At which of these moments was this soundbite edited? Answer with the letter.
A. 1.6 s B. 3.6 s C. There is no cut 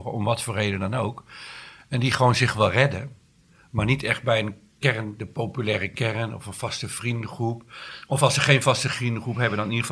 C